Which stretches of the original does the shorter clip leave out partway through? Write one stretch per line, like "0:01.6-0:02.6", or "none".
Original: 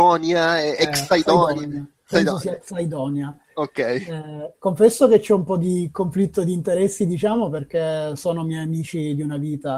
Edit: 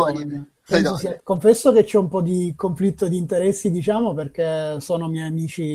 0:02.6-0:04.6